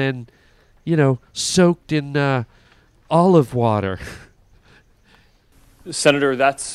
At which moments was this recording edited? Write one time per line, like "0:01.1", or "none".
none